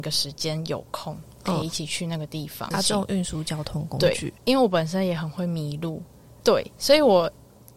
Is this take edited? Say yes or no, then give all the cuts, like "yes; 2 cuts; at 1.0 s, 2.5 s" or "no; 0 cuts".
yes; 2 cuts; at 2.7 s, 6.4 s